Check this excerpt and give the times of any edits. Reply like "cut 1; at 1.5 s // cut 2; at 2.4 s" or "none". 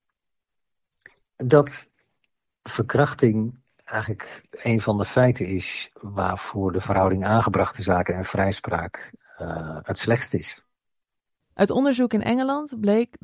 cut 1; at 1.2 s

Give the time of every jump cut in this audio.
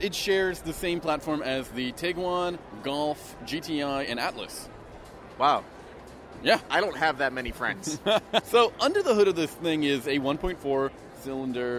cut 1; at 6.7 s // cut 2; at 8.4 s

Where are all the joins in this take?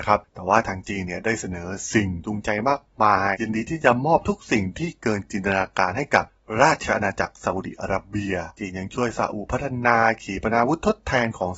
cut 1; at 3.3 s // cut 2; at 8.6 s

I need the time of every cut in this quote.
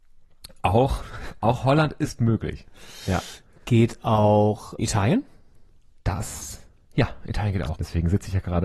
cut 1; at 4.8 s // cut 2; at 7.7 s

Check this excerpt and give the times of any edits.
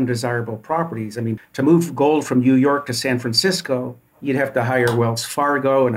cut 1; at 1.4 s // cut 2; at 4.1 s

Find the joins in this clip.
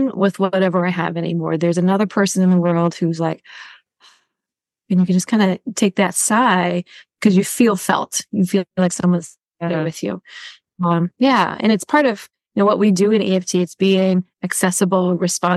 none

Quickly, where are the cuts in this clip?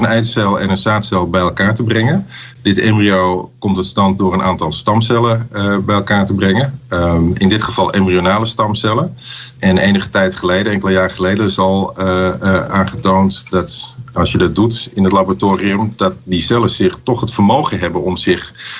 none

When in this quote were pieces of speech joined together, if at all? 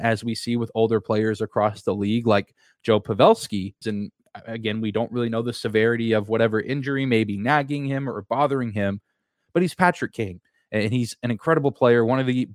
cut 1; at 3.8 s

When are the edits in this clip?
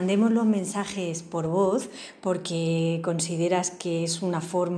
none

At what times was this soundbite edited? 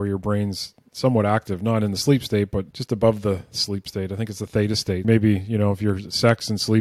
cut 1; at 2.7 s // cut 2; at 5.0 s

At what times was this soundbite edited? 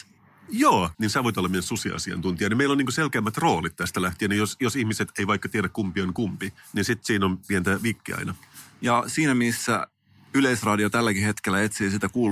cut 1; at 0.9 s

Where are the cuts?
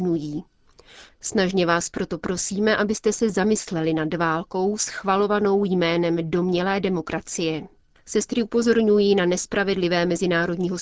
cut 1; at 1.1 s

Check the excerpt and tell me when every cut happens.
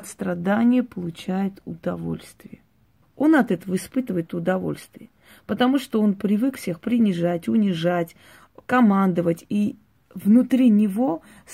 cut 1; at 3.0 s

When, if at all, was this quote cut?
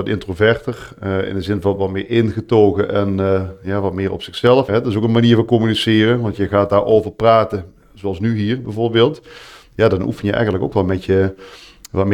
cut 1; at 4.7 s

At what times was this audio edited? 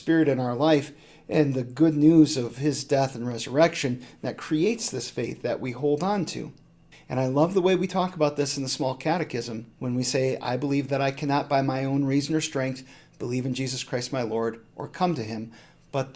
cut 1; at 6.9 s // cut 2; at 9.7 s

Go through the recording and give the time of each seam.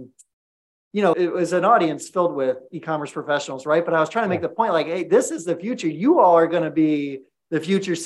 cut 1; at 1.1 s

